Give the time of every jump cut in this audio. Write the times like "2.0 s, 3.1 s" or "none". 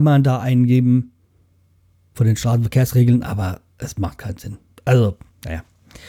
none